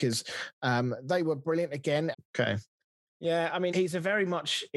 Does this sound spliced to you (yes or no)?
yes